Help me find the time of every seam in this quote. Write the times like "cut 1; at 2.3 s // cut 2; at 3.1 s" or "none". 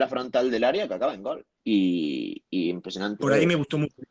cut 1; at 1.5 s // cut 2; at 3.2 s